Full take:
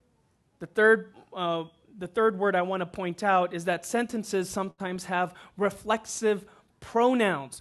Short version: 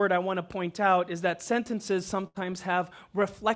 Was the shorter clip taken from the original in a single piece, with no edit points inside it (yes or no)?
yes